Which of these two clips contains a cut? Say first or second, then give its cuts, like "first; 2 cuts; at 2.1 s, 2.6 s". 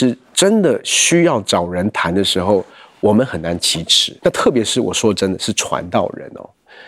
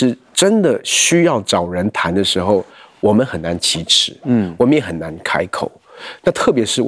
first; 1 cut; at 4.2 s